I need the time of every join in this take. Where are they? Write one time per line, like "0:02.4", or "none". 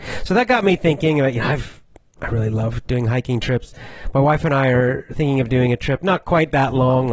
none